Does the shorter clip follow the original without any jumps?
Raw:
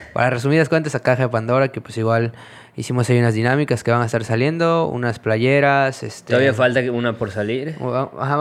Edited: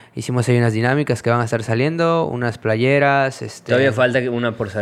yes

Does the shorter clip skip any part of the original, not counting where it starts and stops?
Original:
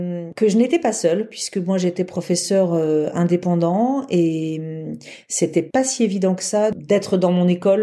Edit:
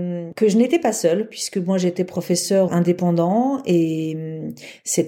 yes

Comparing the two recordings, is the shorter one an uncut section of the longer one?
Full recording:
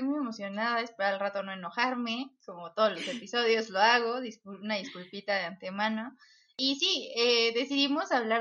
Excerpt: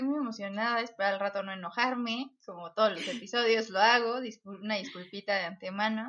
yes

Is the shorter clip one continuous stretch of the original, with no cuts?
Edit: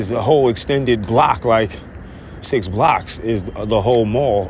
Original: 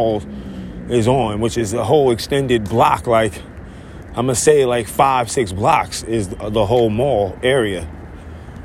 no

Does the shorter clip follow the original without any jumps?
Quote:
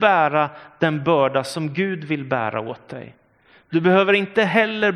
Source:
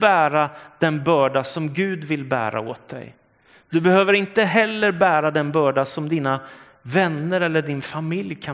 yes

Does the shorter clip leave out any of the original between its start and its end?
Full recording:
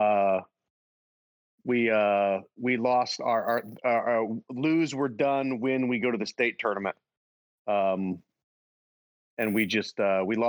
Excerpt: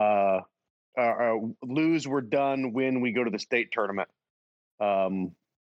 yes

